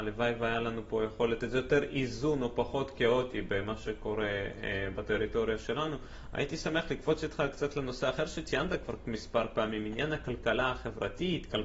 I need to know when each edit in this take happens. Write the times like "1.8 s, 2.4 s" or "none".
none